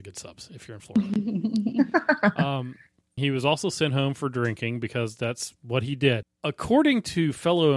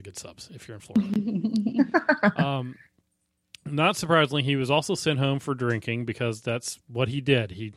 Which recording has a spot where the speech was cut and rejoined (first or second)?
first